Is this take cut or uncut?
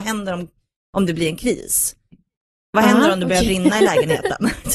uncut